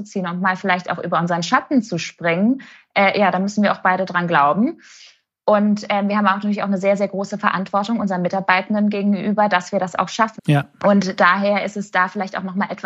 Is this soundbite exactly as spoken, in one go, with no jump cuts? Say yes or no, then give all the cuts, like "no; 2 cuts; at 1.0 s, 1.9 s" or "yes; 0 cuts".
no; 1 cut; at 10.4 s